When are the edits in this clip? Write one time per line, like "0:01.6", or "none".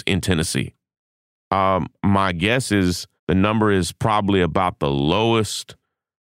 0:01.4
0:03.2